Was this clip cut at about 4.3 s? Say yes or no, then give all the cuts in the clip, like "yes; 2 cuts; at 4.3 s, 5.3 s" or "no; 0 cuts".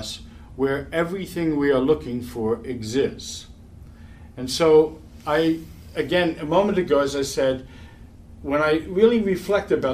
no; 0 cuts